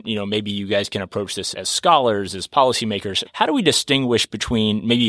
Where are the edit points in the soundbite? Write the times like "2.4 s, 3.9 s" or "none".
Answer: 1.5 s, 3.3 s